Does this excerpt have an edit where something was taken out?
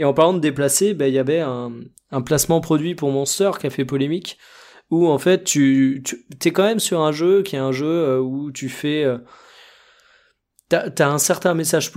no; 0 cuts

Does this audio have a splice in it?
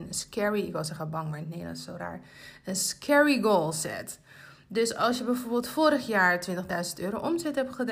no; 0 cuts

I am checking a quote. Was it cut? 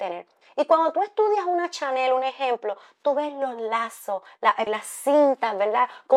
yes; 1 cut; at 4.7 s

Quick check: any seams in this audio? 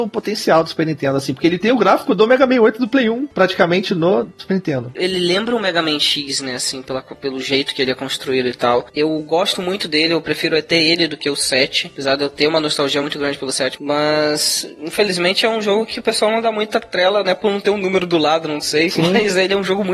no; 0 cuts

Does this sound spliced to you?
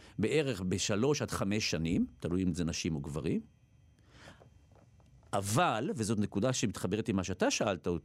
no; 0 cuts

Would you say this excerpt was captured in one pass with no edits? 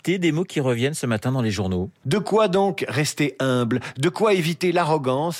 no; 1 cut; at 2.0 s

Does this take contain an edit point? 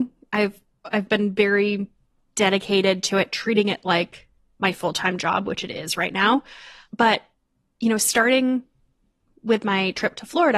yes; 1 cut; at 1.1 s

